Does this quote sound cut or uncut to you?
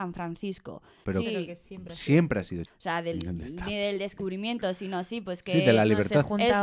cut